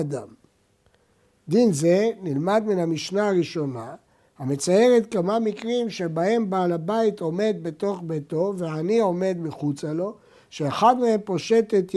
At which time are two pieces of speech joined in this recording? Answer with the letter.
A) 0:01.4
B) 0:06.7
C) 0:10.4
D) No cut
D